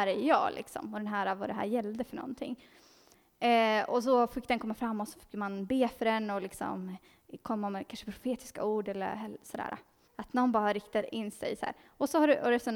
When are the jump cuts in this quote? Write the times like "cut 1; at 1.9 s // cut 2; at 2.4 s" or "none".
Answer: cut 1; at 10.0 s